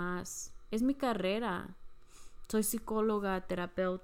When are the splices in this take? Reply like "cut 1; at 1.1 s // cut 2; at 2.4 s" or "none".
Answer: none